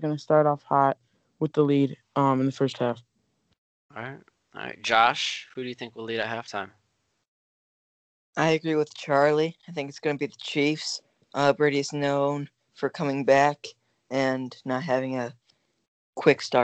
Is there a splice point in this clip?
no; 0 cuts

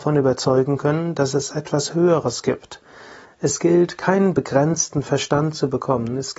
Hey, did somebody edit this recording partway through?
yes; 1 cut; at 3.3 s

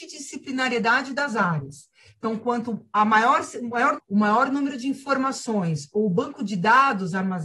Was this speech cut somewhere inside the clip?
yes; 1 cut; at 4.0 s

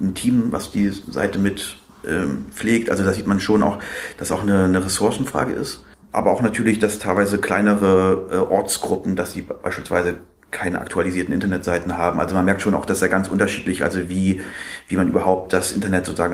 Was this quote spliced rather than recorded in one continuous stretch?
no; 0 cuts

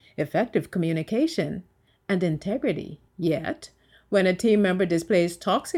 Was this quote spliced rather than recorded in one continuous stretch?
yes; 1 cut; at 3.1 s

